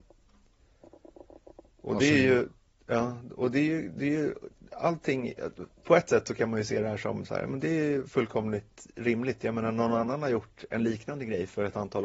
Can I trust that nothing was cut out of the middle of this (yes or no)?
yes